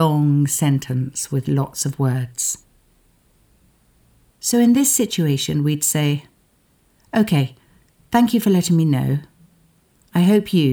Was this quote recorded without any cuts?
no; 1 cut; at 4.3 s

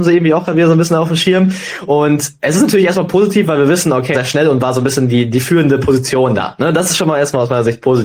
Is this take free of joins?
no; 1 cut; at 4.1 s

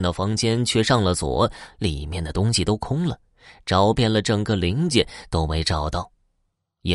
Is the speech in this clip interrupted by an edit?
no; 0 cuts

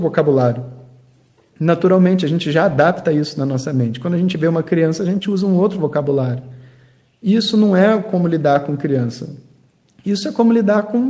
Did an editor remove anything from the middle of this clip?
no; 0 cuts

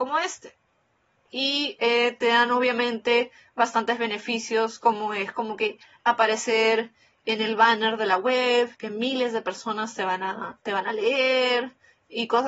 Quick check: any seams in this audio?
yes; 2 cuts; at 1.3 s, 8.7 s

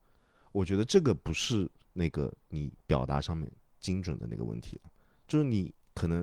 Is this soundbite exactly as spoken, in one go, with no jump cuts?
yes; 0 cuts

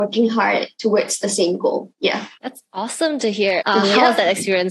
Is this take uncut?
no; 2 cuts; at 2.4 s, 3.6 s

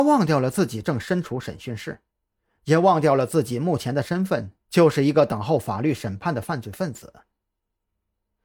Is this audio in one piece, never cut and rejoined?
yes; 0 cuts

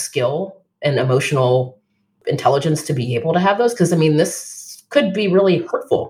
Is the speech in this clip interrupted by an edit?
no; 0 cuts

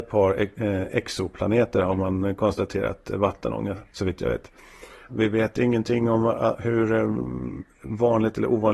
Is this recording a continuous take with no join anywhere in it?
no; 1 cut; at 5.1 s

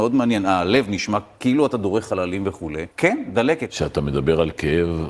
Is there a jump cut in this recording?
yes; 1 cut; at 2.9 s

